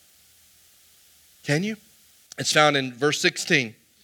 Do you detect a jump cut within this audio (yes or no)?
yes